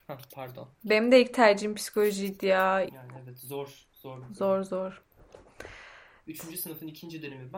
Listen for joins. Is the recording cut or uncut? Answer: cut